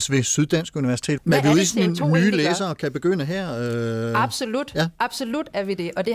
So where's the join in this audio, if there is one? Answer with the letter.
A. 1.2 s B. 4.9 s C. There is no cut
A